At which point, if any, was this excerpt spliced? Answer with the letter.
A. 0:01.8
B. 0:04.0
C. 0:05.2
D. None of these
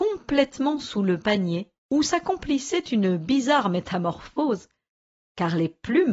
A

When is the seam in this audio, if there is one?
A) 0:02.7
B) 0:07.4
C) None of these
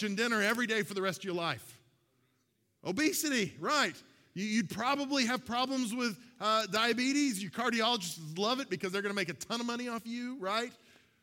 B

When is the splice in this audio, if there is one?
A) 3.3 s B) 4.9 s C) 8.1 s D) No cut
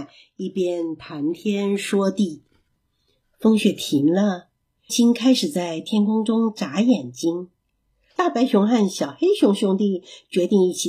B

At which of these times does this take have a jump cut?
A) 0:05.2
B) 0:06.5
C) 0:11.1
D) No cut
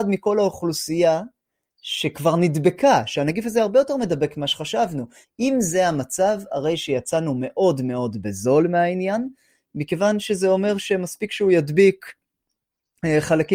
A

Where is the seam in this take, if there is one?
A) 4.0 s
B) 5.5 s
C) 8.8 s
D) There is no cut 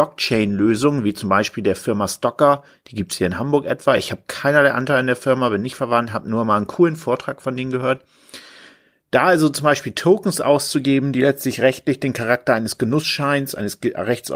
D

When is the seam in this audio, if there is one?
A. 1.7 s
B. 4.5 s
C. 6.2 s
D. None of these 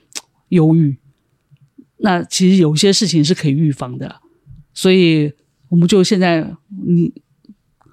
D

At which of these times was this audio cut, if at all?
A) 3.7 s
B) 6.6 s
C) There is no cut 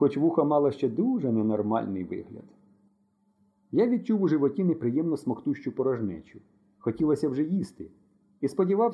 C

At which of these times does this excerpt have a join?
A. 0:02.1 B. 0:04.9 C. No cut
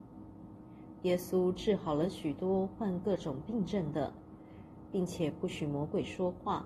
B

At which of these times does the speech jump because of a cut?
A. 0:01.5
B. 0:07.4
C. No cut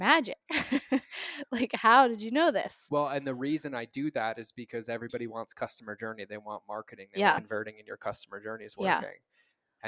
B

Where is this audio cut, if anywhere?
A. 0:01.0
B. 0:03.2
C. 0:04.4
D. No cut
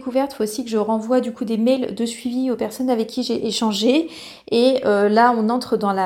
D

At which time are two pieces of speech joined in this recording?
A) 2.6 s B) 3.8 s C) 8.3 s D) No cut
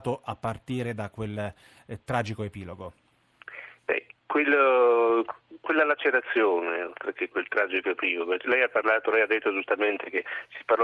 B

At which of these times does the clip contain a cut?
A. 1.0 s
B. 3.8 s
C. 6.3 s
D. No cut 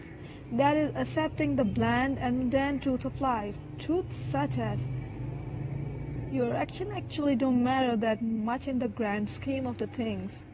C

